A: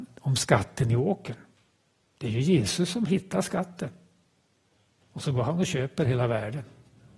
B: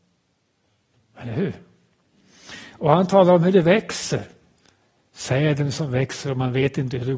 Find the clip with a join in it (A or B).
B